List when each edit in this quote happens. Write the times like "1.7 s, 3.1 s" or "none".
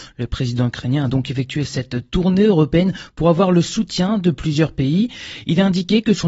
none